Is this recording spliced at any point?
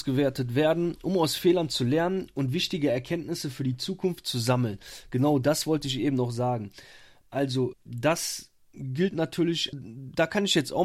yes; 2 cuts; at 7.7 s, 9.7 s

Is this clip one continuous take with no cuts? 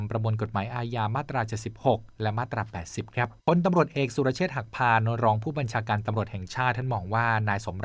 no; 1 cut; at 3.4 s

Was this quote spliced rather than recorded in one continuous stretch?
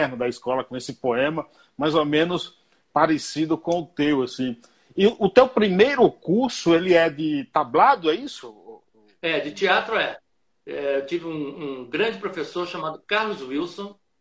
no; 0 cuts

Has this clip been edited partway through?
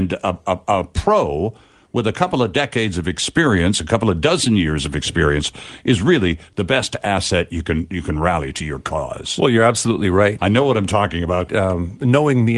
yes; 2 cuts; at 10.4 s, 11.5 s

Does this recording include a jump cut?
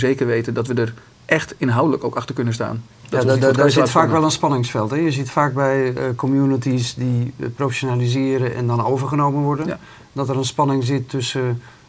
no; 0 cuts

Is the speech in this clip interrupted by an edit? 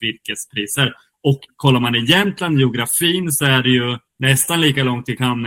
yes; 1 cut; at 4.1 s

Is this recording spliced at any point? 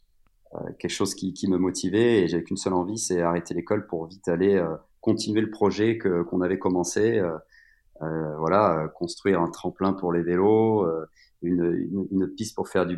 no; 0 cuts

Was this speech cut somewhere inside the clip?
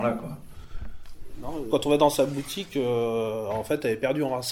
yes; 1 cut; at 1.7 s

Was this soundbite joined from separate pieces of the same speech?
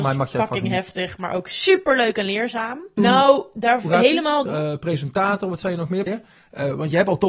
yes; 3 cuts; at 3.0 s, 4.5 s, 6.1 s

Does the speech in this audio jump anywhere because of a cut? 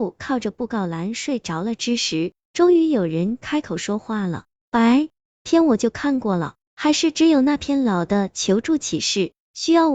no; 0 cuts

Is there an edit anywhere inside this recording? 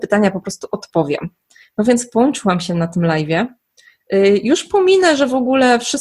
no; 0 cuts

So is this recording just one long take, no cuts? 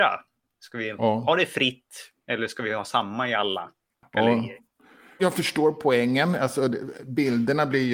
yes; 0 cuts

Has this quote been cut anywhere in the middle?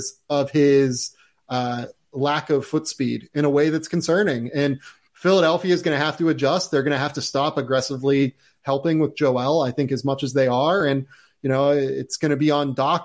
no; 0 cuts

